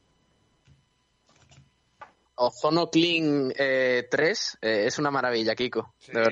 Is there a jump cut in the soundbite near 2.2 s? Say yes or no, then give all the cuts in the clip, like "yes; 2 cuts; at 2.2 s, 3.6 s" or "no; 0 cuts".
yes; 1 cut; at 2.2 s